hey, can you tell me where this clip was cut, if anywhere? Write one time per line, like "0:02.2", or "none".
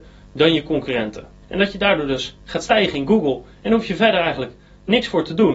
0:01.4